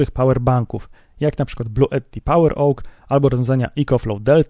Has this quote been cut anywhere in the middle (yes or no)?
no